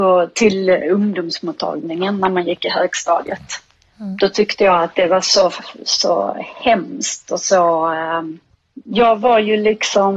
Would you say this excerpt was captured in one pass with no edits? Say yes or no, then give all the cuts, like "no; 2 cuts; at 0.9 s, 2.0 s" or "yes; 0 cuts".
yes; 0 cuts